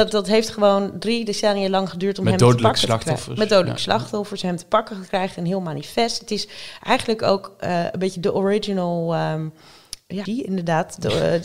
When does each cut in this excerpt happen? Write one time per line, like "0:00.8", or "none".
0:10.3